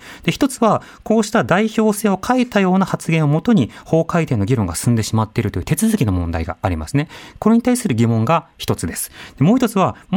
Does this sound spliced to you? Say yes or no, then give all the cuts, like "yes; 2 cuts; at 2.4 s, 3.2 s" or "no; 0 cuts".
no; 0 cuts